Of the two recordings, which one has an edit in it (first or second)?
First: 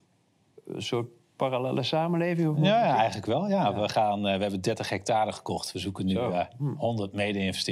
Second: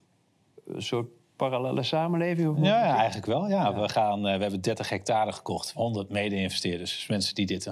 second